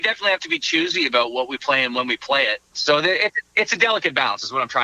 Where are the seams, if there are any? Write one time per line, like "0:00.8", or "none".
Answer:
0:02.7